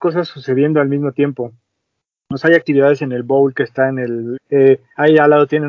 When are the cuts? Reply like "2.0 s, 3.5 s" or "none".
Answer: 4.4 s